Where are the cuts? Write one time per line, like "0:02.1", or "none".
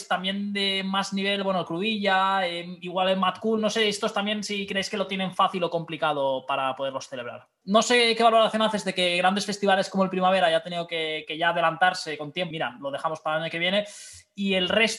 0:07.6
0:12.5